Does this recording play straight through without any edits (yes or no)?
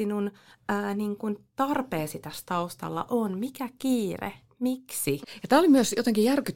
no